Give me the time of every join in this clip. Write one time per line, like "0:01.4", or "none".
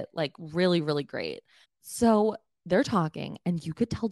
0:01.6

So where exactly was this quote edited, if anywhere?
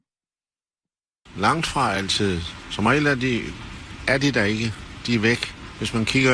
0:01.3

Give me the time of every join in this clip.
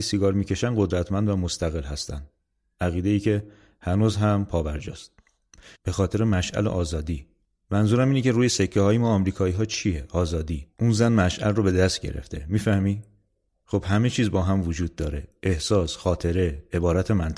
0:05.7

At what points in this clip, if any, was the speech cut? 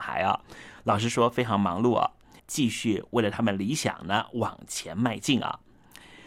0:02.4

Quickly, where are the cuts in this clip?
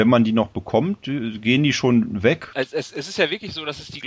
none

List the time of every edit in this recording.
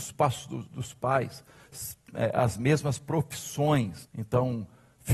0:04.0

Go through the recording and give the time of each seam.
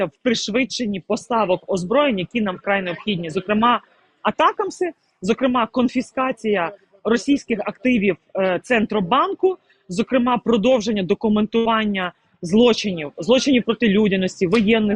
none

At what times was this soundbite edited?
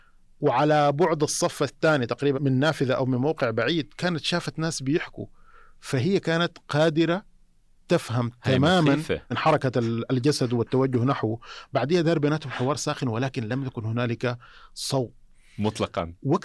0:02.3
0:09.3

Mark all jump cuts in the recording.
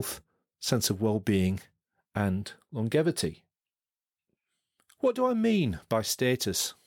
none

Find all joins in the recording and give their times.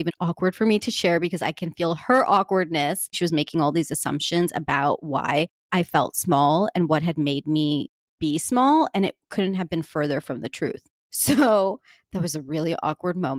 0:03.1

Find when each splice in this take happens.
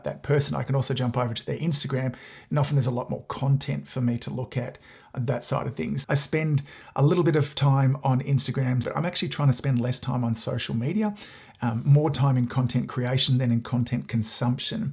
0:06.0
0:08.8

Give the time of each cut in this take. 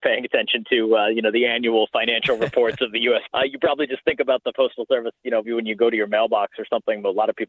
0:03.3
0:05.4

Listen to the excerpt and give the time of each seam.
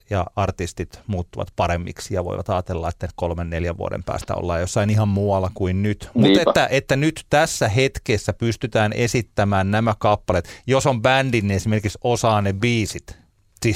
none

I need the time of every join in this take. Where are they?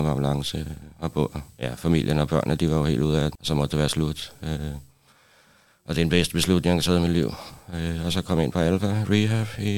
0:03.4

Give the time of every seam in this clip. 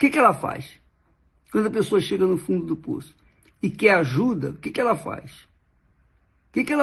none

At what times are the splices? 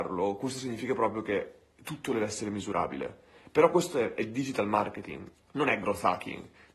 0:05.3

